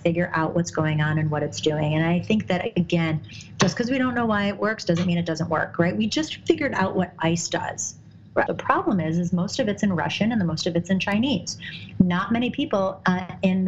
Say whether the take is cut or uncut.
cut